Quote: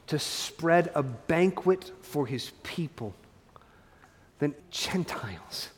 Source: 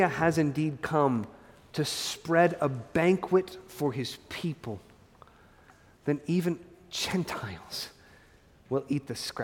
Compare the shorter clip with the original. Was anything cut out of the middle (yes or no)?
yes